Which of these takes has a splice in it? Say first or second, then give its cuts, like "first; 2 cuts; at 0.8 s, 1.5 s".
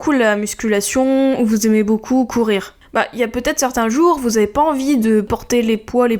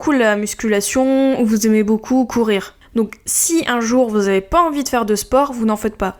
second; 1 cut; at 2.9 s